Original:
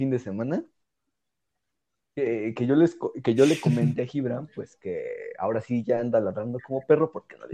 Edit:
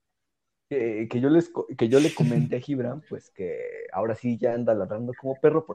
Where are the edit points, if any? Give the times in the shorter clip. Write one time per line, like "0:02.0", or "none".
none